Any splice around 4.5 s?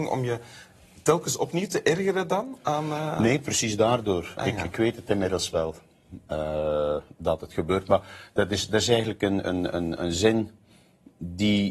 no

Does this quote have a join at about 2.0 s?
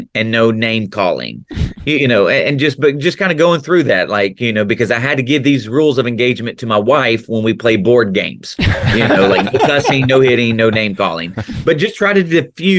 no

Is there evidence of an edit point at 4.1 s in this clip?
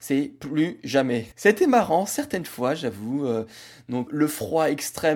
yes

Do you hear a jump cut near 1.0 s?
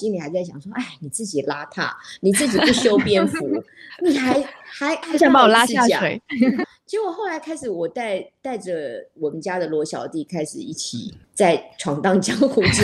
no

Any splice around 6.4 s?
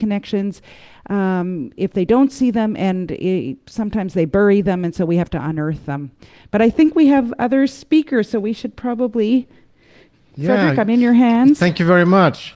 no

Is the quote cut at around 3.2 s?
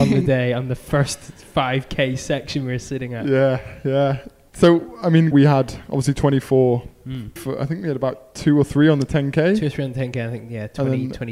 no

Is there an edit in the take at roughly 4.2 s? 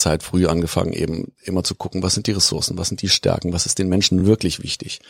no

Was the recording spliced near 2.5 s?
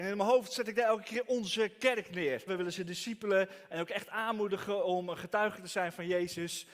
yes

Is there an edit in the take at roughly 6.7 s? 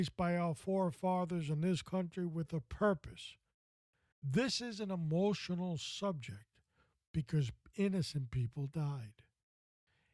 no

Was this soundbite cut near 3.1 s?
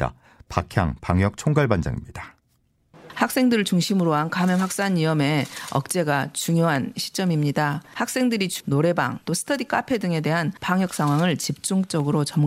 no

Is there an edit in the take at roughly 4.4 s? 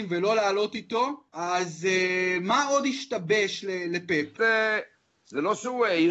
yes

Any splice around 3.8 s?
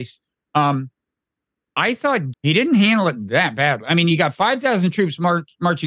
no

